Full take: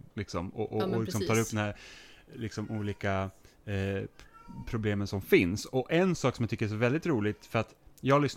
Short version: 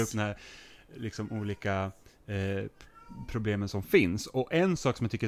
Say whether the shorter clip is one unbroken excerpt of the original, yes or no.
yes